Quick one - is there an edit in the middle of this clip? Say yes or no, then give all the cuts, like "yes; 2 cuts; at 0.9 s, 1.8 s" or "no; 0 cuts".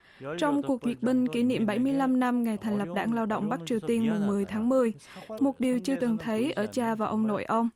yes; 1 cut; at 5.4 s